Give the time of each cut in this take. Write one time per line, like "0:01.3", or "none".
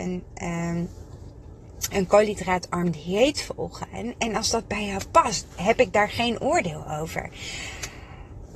0:05.5